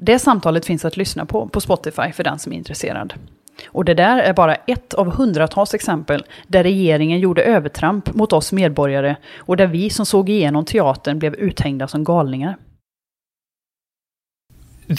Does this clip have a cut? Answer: no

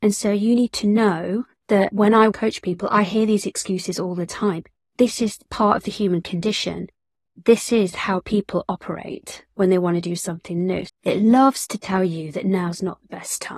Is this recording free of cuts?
no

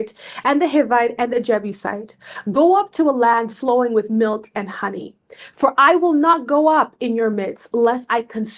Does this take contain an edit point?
no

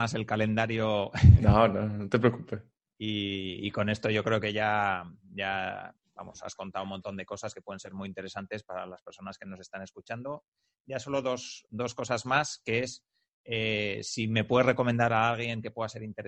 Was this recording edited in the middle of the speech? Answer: no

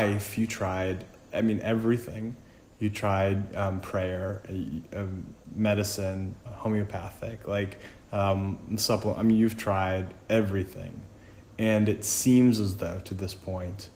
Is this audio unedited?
no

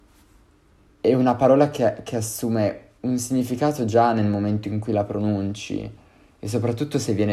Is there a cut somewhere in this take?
no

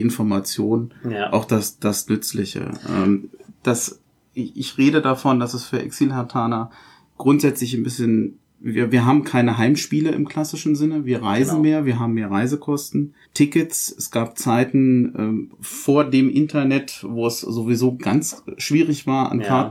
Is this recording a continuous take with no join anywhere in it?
no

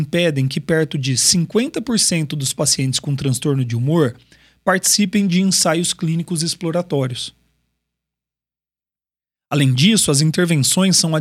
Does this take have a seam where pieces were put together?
no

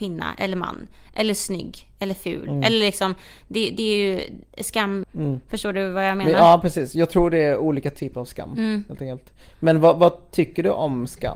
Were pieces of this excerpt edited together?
yes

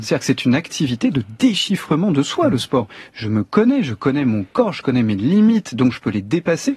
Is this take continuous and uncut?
yes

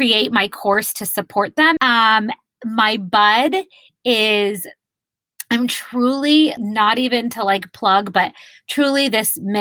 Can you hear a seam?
yes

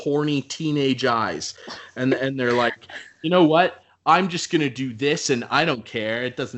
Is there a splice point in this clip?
no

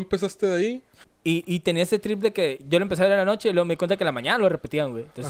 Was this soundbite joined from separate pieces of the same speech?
yes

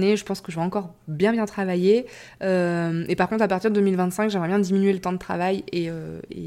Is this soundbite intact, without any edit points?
yes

